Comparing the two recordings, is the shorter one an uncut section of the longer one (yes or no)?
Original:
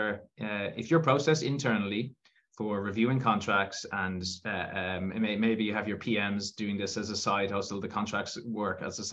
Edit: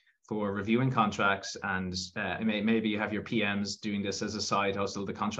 no